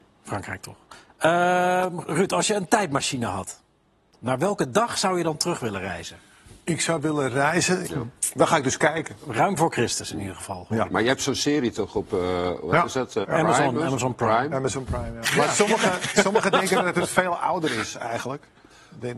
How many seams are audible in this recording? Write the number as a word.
three